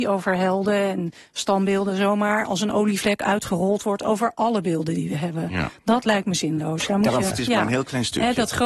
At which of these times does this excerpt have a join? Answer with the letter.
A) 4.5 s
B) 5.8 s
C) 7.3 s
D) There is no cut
C